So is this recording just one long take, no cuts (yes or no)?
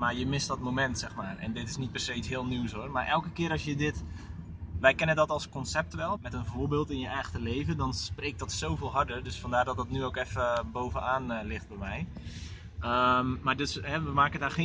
no